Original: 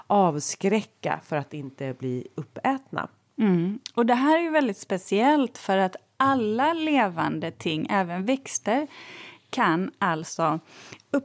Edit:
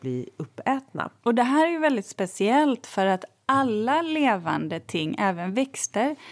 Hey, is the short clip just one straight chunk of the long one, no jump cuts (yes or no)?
no